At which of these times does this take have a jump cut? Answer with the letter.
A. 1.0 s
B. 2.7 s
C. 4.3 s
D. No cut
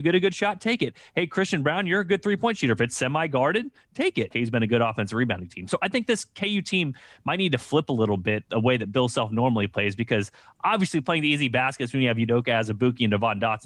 C